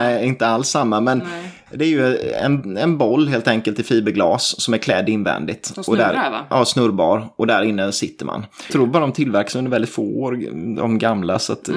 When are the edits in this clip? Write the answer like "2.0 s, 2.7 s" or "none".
8.7 s